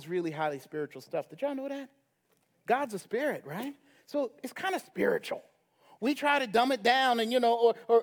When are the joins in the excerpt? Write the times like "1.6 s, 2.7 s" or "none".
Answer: none